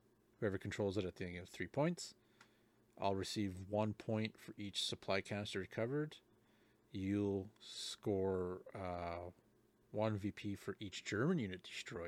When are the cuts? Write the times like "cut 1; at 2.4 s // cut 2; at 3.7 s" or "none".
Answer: none